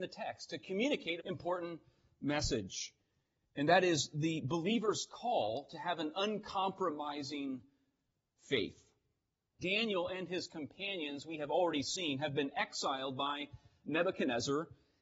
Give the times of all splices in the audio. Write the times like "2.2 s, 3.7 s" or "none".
1.2 s, 9.6 s